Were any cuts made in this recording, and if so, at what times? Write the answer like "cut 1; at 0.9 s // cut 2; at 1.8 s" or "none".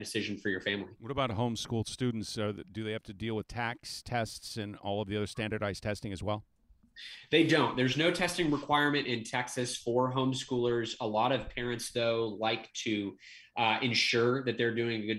none